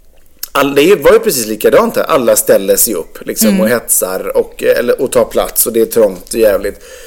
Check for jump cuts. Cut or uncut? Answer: uncut